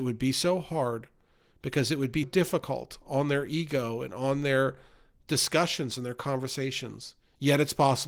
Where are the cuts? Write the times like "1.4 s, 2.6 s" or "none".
2.2 s